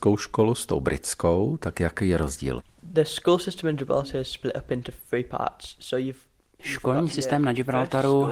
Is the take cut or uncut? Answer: uncut